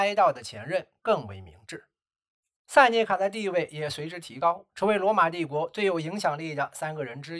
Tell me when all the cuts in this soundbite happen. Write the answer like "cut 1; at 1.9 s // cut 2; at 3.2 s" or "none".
none